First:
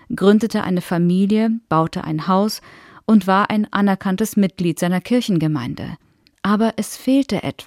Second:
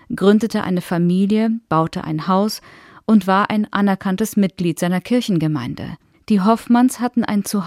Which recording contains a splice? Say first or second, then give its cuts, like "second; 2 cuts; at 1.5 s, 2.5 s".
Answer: second; 1 cut; at 6.1 s